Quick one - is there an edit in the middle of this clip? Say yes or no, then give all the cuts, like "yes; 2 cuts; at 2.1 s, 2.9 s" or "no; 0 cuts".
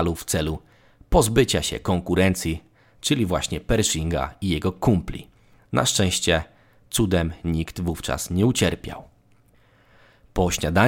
yes; 1 cut; at 5.6 s